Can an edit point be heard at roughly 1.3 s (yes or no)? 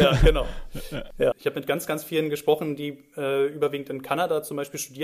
yes